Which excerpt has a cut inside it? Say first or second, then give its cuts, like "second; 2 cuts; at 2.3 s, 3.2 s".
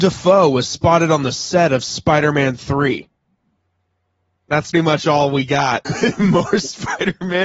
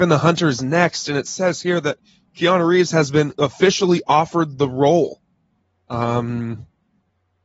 first; 2 cuts; at 4.7 s, 5.8 s